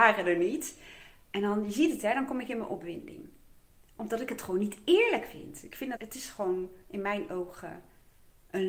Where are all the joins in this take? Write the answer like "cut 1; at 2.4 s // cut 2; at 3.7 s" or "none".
cut 1; at 6.0 s